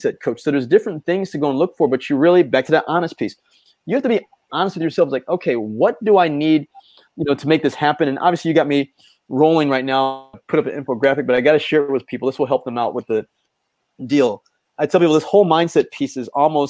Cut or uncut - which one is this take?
uncut